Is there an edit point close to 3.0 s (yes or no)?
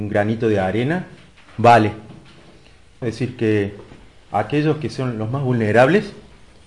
yes